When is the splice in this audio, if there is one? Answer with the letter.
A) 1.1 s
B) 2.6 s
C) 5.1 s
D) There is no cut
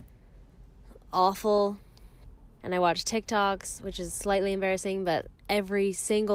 B